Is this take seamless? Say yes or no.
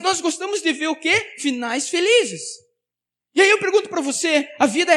yes